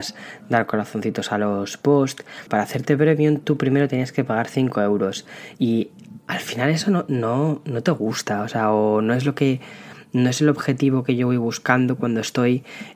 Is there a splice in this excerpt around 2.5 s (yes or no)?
yes